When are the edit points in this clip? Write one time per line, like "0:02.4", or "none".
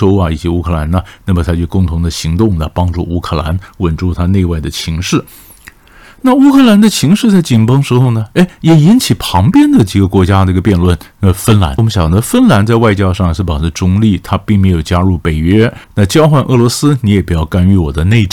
0:11.8
0:15.8